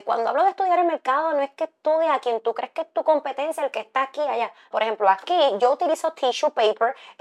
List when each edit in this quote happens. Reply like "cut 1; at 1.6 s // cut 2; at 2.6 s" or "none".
cut 1; at 4.7 s